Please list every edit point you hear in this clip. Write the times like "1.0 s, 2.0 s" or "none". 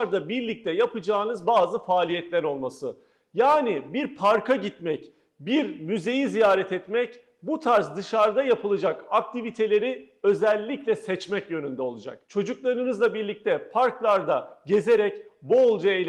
12.2 s